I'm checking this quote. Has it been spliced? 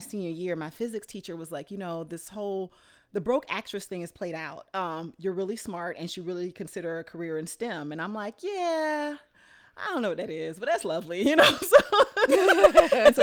no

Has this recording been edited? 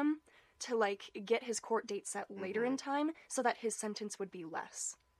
no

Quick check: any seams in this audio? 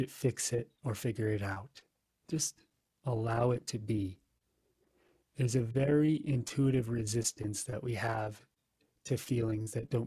no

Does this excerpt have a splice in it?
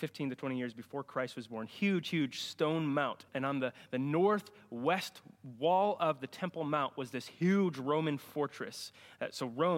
yes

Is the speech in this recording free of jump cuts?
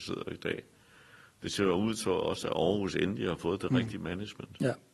yes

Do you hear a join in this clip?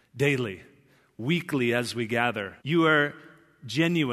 yes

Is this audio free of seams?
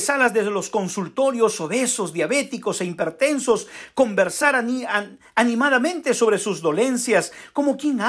yes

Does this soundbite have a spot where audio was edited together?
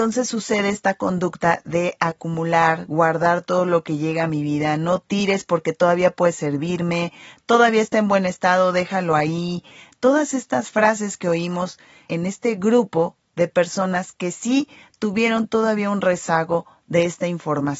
no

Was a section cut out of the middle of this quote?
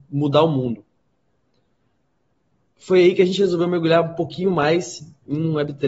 no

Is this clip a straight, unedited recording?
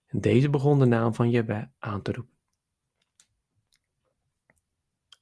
yes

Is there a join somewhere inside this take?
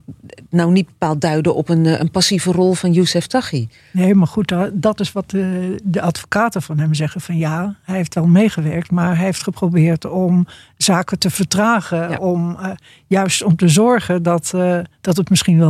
no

